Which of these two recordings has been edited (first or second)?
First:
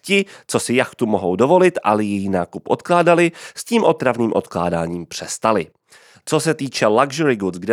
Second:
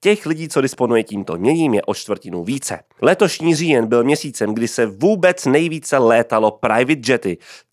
second